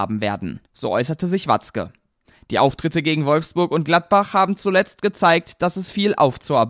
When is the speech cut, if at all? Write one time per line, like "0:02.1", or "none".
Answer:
0:02.3